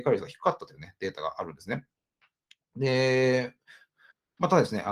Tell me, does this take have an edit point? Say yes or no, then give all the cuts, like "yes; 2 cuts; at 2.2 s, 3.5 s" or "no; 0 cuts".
no; 0 cuts